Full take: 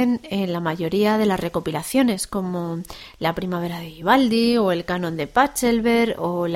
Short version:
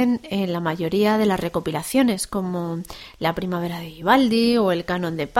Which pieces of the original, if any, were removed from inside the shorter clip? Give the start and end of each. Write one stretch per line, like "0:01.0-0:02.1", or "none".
none